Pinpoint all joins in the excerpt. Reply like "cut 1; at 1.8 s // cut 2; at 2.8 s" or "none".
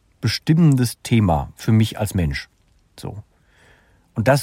none